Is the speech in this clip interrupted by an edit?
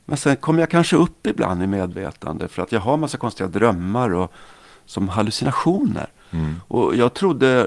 no; 0 cuts

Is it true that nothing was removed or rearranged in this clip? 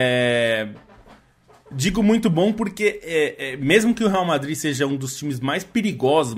yes; 0 cuts

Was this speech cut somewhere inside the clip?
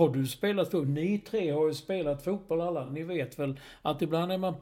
no; 0 cuts

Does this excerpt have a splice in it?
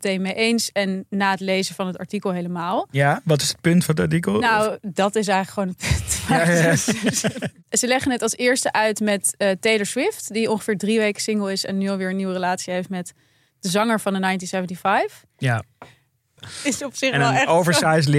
yes; 1 cut; at 16.4 s

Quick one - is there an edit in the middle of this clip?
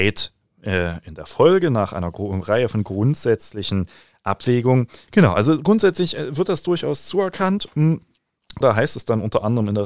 yes; 2 cuts; at 5.1 s, 8.6 s

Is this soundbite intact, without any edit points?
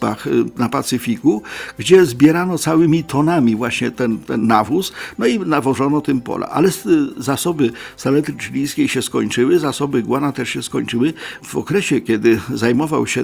no; 2 cuts; at 3.9 s, 11.4 s

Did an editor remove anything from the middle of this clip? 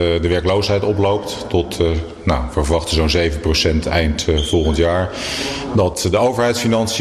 no; 0 cuts

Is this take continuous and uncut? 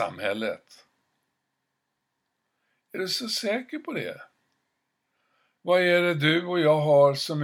yes; 0 cuts

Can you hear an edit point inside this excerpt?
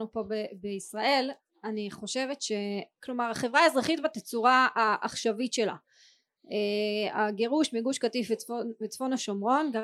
yes; 1 cut; at 3.0 s

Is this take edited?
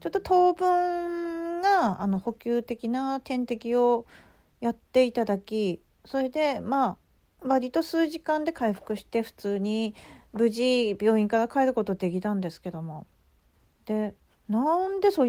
no; 0 cuts

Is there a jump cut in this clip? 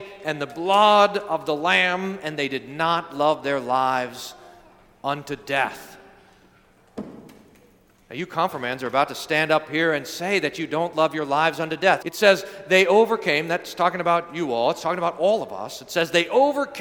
yes; 1 cut; at 12.0 s

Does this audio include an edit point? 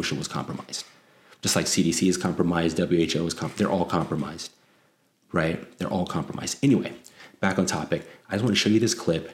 no; 0 cuts

